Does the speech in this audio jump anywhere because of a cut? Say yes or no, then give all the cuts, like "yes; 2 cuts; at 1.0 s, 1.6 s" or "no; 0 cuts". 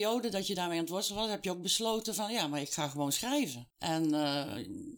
yes; 1 cut; at 3.7 s